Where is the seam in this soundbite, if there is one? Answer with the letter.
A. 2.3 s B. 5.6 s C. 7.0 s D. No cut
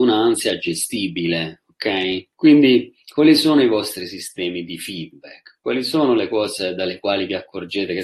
A